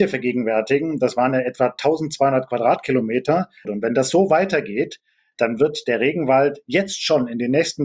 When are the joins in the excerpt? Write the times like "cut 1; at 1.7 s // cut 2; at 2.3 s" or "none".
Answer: cut 1; at 3.6 s